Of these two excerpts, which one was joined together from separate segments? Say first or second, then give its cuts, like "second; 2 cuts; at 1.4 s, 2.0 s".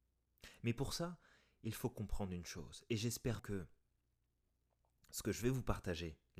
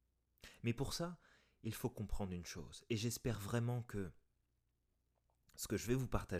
first; 1 cut; at 3.4 s